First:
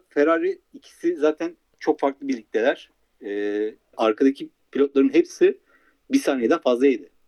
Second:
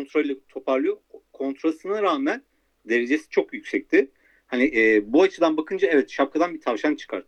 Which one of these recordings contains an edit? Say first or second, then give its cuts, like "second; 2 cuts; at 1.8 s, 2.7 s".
first; 1 cut; at 3.9 s